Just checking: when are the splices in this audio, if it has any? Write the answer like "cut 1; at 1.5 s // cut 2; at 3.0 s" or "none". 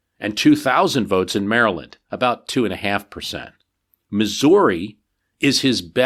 none